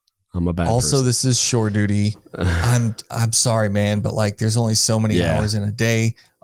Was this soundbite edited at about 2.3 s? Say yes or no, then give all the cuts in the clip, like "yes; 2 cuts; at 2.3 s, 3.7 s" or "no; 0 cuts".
no; 0 cuts